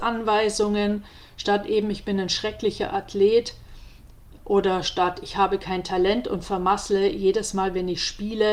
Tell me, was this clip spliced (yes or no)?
no